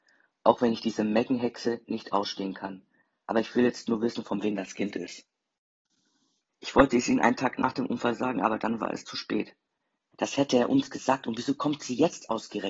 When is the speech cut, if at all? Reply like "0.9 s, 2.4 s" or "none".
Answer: 6.5 s, 10.1 s